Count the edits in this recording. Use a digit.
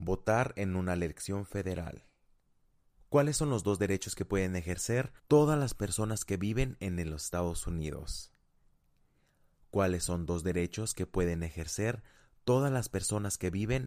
2